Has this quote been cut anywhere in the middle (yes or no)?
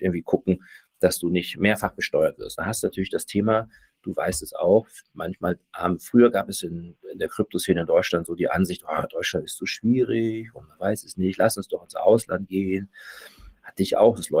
no